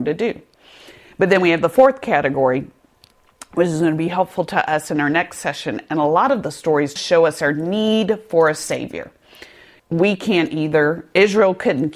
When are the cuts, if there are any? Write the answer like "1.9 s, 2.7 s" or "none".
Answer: 7.0 s, 9.8 s